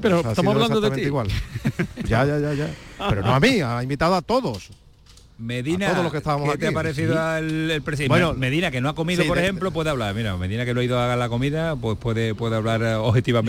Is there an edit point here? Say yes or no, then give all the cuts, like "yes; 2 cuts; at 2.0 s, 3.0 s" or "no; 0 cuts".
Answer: no; 0 cuts